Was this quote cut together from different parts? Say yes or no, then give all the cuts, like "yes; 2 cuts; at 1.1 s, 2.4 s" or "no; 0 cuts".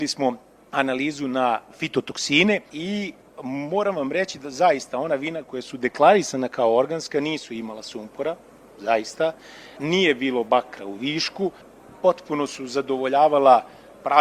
no; 0 cuts